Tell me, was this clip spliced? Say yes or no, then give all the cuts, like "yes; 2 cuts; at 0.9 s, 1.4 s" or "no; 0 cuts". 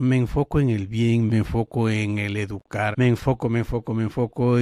yes; 2 cuts; at 1.3 s, 2.9 s